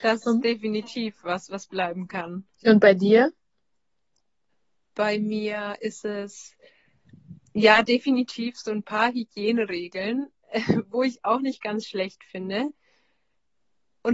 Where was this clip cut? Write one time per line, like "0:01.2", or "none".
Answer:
0:02.5

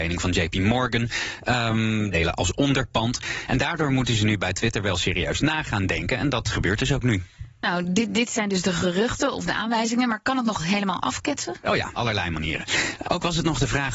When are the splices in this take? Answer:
0:02.1
0:11.9
0:13.0

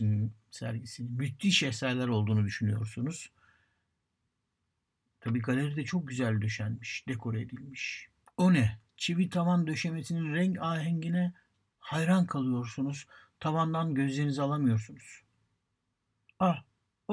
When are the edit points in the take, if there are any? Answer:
none

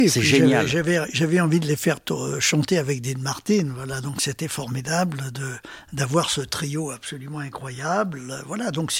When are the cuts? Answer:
none

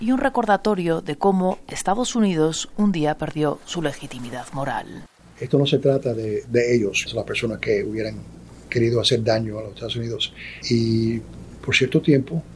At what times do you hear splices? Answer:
0:07.1
0:10.6

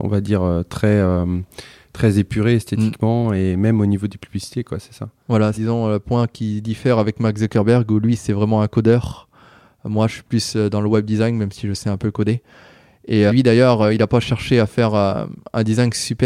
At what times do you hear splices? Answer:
0:05.5
0:13.3

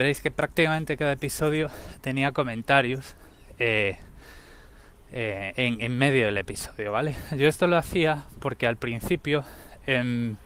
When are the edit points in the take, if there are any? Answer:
none

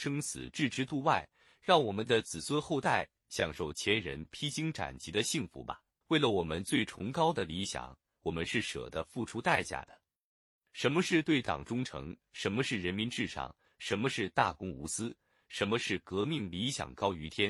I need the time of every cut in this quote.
0:06.0

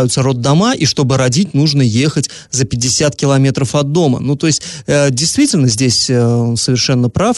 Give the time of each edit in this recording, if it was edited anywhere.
none

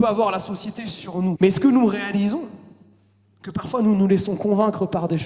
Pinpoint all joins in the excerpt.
0:01.3

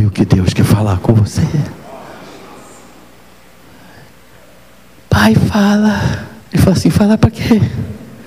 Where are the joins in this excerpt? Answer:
0:06.4

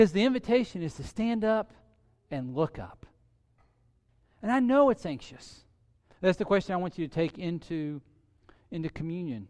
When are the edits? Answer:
0:06.1

